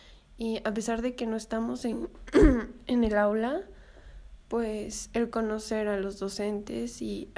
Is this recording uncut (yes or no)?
yes